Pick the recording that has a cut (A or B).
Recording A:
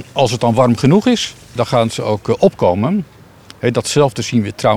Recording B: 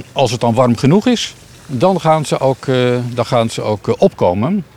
A